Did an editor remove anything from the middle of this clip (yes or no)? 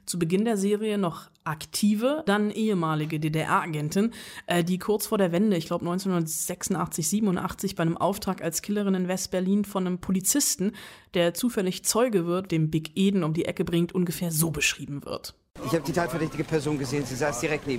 yes